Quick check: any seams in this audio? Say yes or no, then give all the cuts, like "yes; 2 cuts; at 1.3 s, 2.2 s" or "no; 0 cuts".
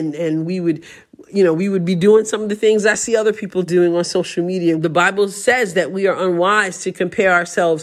yes; 1 cut; at 4.8 s